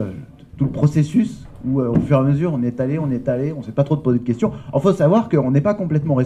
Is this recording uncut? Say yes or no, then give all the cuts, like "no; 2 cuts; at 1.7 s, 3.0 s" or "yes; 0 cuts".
yes; 0 cuts